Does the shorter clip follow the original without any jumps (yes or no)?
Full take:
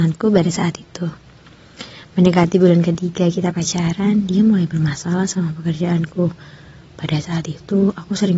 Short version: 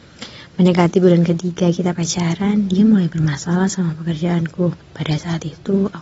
no